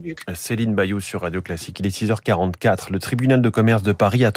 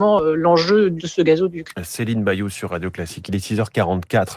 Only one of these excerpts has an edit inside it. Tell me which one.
second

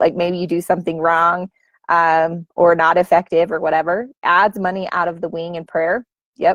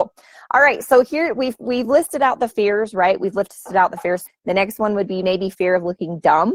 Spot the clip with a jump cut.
second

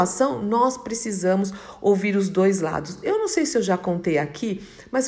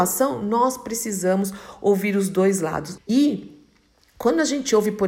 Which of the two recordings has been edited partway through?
second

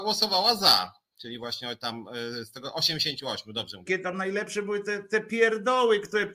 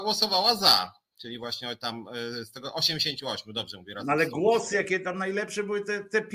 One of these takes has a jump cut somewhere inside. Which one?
first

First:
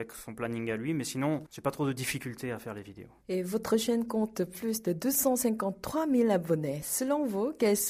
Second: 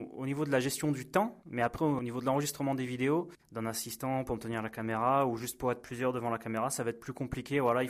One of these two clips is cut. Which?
second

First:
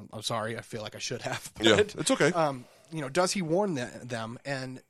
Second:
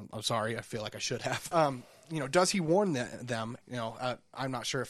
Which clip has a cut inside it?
second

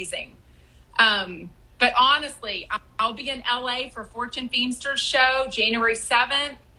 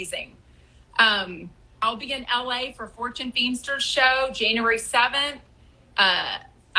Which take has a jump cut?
second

